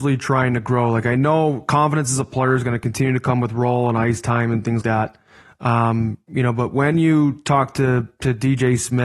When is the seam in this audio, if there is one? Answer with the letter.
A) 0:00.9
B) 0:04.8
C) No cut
B